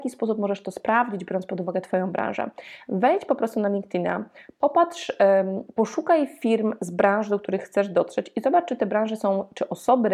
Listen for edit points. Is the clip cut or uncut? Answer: uncut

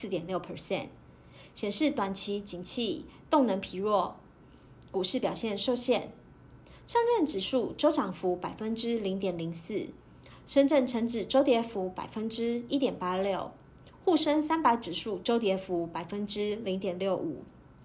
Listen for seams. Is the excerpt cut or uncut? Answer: uncut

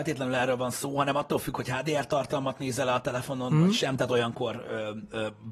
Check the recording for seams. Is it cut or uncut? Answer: uncut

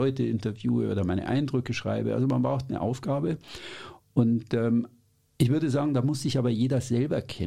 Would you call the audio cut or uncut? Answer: uncut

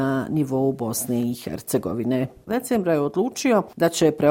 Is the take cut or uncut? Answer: cut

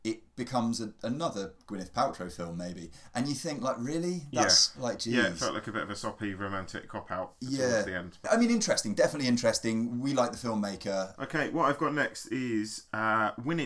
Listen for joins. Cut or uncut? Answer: cut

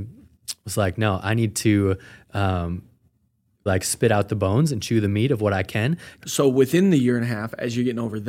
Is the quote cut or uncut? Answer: cut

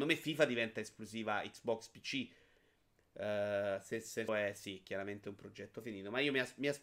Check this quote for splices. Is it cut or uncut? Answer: cut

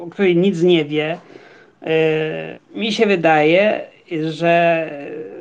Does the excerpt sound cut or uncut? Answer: cut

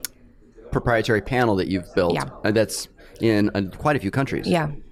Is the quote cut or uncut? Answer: uncut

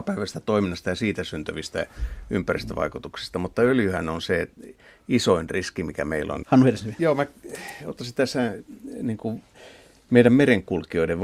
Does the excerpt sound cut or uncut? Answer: cut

